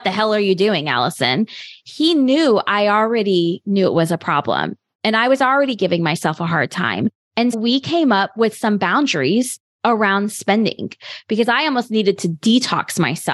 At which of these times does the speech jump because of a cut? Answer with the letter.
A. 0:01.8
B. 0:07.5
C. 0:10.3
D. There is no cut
B